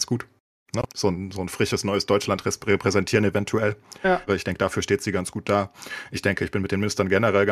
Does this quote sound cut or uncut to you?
cut